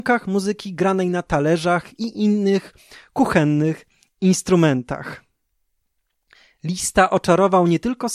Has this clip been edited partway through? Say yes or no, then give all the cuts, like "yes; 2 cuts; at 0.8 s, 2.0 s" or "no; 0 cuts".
no; 0 cuts